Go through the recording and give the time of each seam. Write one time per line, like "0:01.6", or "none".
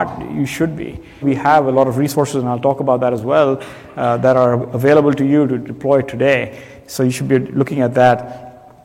0:01.2